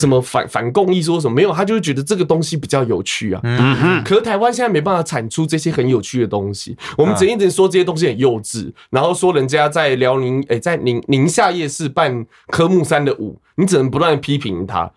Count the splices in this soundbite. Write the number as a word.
zero